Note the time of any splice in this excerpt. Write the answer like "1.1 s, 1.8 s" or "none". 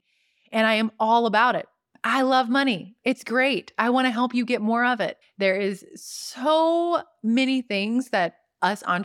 5.2 s